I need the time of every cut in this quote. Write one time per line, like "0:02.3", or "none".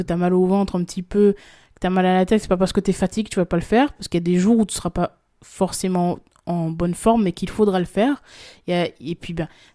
none